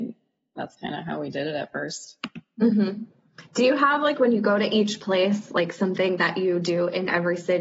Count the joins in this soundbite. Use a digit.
0